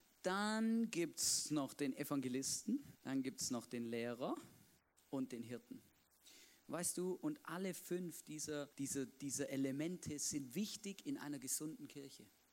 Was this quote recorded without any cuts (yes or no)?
no